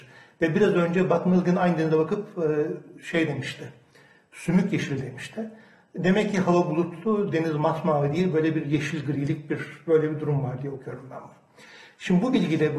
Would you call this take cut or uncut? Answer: uncut